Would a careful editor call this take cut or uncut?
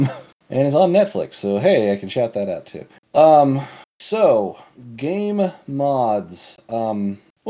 uncut